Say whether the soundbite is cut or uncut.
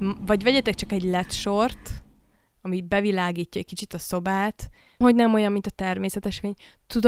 cut